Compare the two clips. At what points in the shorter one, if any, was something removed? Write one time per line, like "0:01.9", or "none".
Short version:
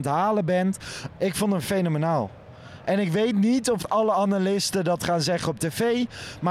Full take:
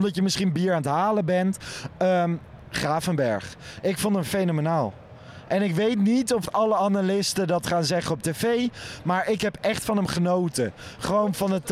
0:01.2